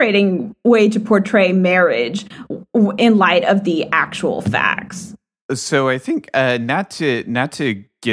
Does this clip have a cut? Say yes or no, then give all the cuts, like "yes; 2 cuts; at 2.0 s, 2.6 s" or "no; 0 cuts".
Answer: no; 0 cuts